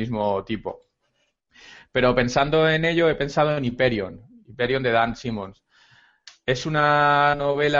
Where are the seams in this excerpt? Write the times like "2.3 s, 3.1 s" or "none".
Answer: none